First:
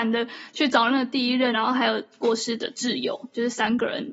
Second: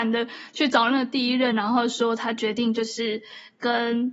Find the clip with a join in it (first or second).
first